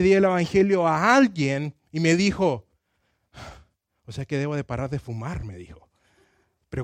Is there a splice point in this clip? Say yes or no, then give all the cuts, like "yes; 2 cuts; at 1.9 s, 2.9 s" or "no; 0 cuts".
no; 0 cuts